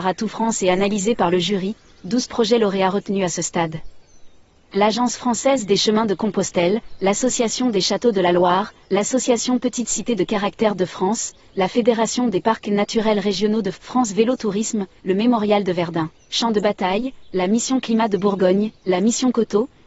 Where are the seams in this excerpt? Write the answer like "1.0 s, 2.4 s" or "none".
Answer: 13.7 s, 14.9 s

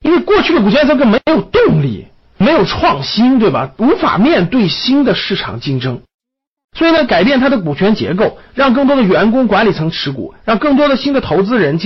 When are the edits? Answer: none

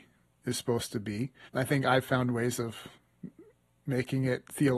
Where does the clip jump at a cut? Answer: 1.5 s

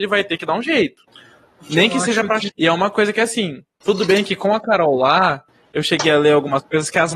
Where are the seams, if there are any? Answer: 2.5 s

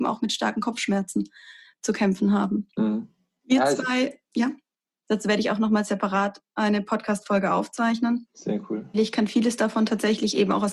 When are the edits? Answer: 5.0 s, 8.9 s

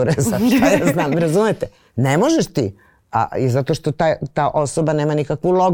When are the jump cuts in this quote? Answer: none

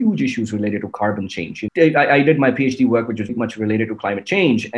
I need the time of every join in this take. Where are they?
1.7 s, 3.3 s

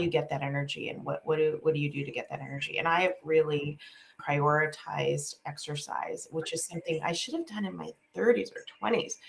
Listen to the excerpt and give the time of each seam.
none

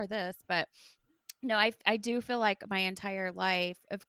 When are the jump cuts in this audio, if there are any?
none

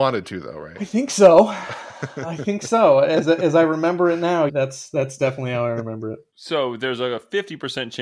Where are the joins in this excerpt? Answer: 4.5 s

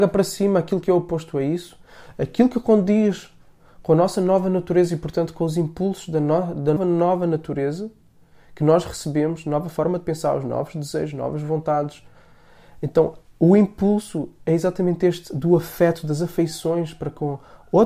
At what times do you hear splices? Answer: 6.8 s

